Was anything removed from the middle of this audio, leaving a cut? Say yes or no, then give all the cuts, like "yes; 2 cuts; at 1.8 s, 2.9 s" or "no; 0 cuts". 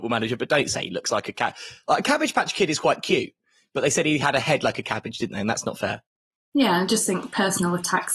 no; 0 cuts